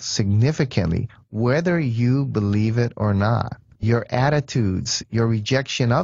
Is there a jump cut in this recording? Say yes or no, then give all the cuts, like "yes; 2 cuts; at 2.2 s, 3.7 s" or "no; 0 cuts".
yes; 1 cut; at 3.8 s